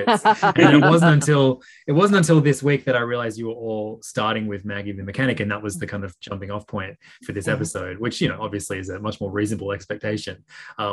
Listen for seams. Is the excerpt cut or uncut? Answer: uncut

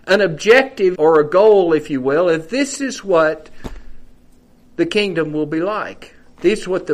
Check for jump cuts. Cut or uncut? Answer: cut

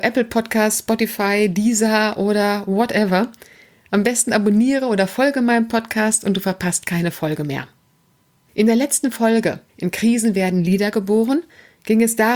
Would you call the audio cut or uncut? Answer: cut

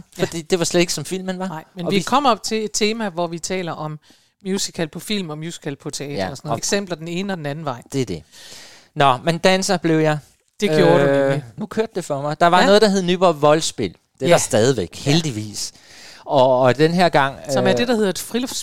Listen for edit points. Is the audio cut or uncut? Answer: cut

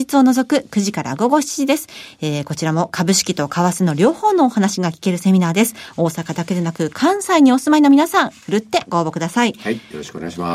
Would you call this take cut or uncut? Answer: uncut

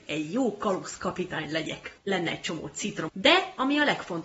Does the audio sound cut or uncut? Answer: cut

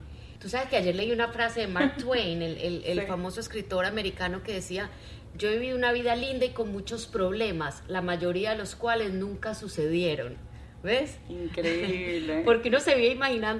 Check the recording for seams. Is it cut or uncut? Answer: uncut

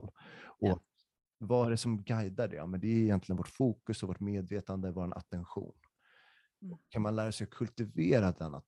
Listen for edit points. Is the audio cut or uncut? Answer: uncut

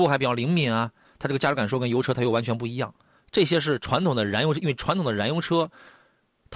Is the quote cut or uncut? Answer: cut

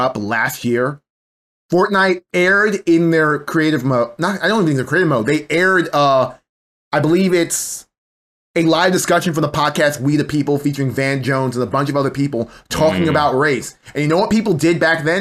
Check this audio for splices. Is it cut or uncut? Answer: uncut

